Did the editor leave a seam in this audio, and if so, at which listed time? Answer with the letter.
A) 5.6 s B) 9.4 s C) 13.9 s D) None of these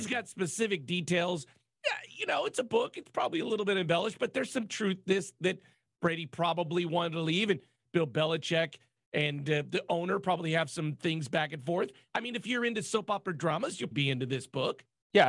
C